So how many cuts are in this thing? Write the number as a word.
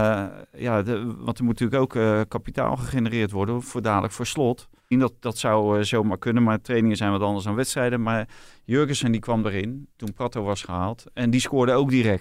one